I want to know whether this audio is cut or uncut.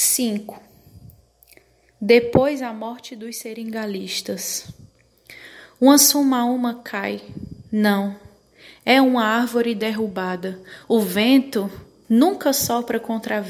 uncut